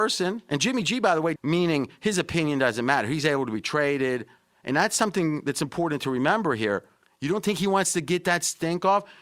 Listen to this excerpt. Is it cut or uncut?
cut